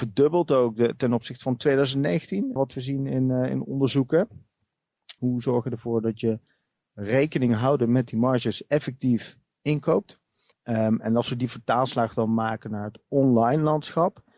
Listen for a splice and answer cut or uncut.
cut